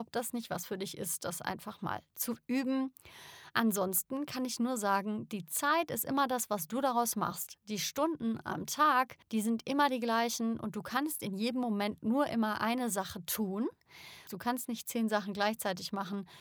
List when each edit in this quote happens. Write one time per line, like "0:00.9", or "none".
0:09.2
0:14.3